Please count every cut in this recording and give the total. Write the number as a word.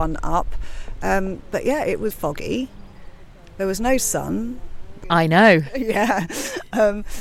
two